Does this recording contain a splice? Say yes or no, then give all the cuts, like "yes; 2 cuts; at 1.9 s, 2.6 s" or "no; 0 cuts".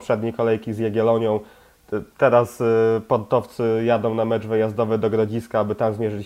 no; 0 cuts